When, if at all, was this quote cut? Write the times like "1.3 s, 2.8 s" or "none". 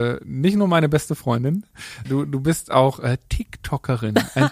2.0 s